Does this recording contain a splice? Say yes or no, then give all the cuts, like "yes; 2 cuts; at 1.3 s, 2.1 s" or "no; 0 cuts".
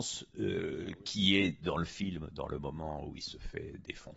no; 0 cuts